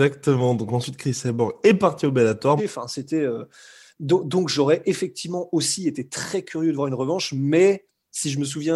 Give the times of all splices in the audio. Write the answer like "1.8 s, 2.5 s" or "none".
2.6 s

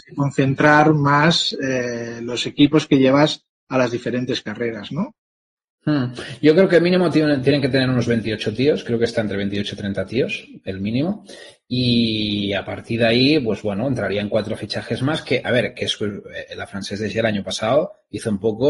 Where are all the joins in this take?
none

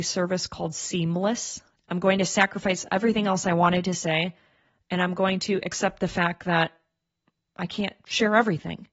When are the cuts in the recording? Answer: 1.8 s

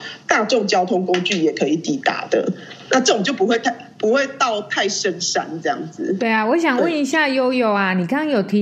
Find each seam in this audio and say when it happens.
6.2 s

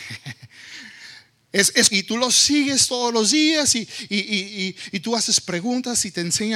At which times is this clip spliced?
1.9 s

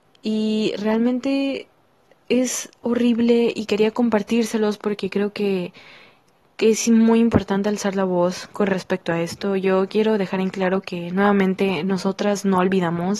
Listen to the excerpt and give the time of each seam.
none

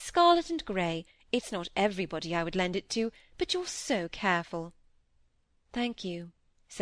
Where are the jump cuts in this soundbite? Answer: none

